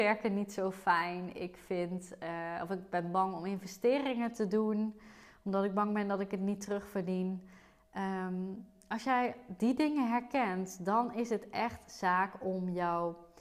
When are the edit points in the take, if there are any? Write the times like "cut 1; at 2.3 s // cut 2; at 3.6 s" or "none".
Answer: none